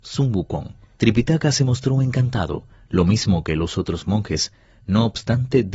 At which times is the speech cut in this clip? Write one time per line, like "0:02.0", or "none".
0:01.0